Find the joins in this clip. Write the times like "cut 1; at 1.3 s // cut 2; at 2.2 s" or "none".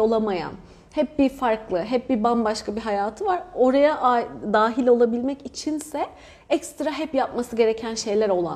none